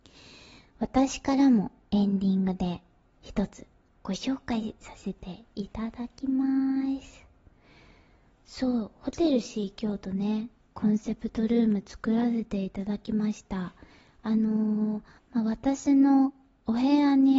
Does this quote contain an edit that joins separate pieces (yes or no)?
yes